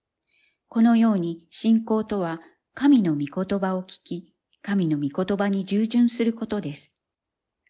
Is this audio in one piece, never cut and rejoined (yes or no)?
yes